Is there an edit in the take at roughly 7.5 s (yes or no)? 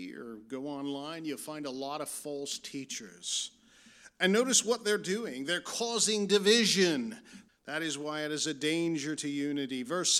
yes